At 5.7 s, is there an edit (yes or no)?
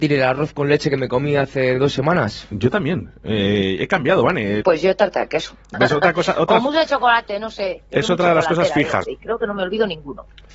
yes